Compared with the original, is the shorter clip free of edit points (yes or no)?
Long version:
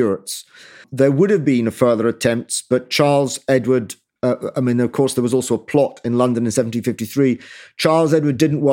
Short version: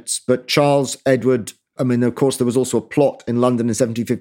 no